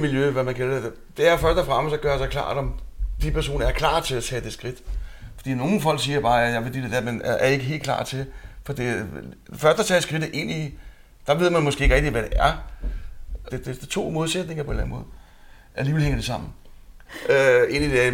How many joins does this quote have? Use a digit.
2